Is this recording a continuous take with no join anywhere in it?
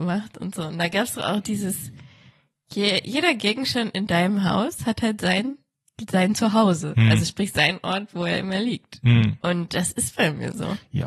yes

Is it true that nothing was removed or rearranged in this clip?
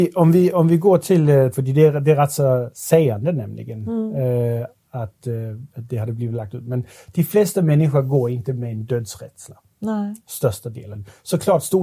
no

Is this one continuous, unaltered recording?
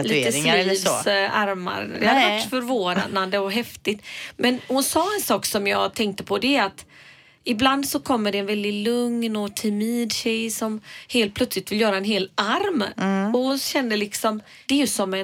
yes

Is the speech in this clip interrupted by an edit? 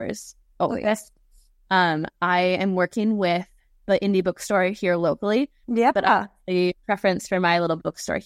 yes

